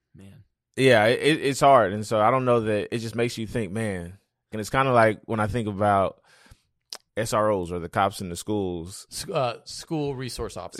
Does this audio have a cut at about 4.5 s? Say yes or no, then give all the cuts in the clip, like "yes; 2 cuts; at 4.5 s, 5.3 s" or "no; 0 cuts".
yes; 2 cuts; at 4.5 s, 7.1 s